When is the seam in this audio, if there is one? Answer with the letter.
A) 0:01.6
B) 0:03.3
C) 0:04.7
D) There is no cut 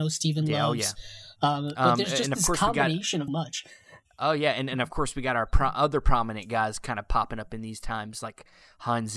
B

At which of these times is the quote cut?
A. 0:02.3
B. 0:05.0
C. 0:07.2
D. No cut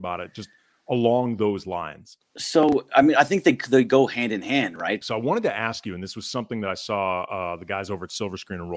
B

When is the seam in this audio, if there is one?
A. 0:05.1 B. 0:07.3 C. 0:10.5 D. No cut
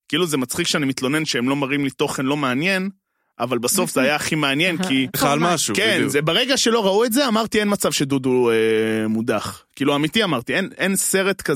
A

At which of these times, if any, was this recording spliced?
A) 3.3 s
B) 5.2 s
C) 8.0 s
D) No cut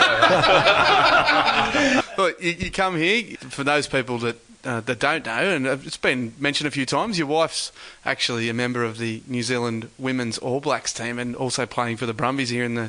A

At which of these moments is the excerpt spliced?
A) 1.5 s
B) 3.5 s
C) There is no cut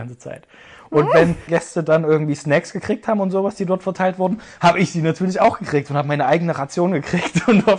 A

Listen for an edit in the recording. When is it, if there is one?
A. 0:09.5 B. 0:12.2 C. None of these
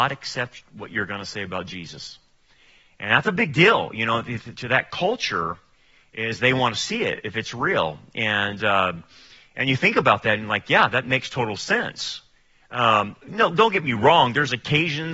C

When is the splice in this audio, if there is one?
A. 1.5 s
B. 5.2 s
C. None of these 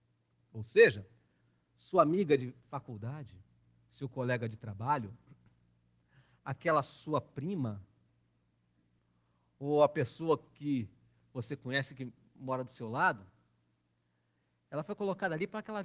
C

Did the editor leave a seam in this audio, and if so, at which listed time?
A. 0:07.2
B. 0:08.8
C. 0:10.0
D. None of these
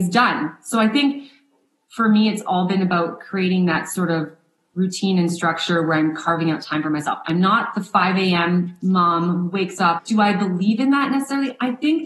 D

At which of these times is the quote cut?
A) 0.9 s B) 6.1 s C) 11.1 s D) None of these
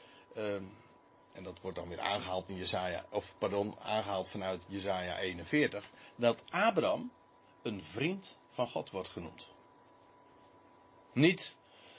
D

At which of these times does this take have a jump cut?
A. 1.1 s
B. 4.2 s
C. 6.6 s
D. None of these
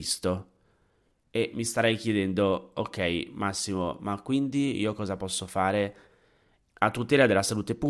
C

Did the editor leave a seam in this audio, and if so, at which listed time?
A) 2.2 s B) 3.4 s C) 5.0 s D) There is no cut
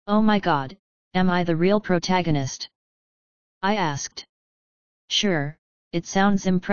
B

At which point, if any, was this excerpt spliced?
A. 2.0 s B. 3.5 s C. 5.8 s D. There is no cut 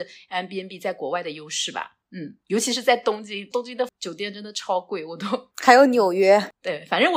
D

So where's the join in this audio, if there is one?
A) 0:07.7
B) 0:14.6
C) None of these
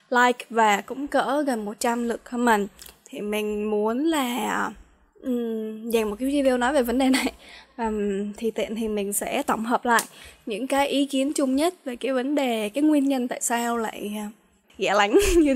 B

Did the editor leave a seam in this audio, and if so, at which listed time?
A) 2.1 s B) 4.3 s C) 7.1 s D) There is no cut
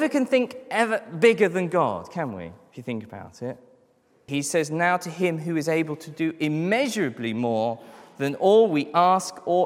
B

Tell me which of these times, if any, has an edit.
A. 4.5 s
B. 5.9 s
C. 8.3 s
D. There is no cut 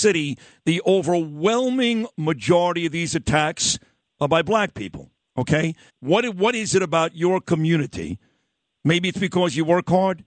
B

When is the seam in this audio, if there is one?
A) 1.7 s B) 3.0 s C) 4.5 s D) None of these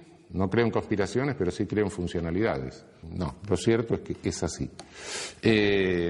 B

